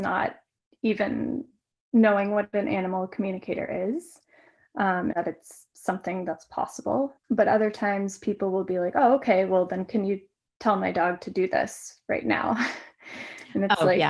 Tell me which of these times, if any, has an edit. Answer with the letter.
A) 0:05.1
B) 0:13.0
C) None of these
A